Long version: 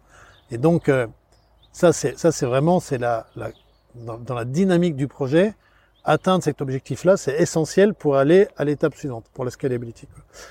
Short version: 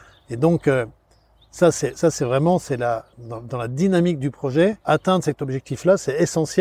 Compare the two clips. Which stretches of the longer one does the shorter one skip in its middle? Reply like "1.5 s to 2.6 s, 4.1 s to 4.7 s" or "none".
3.3 s to 3.9 s, 5.6 s to 6.0 s